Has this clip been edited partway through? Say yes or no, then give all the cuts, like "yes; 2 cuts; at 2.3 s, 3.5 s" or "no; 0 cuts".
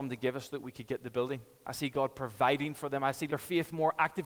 yes; 2 cuts; at 1.6 s, 3.3 s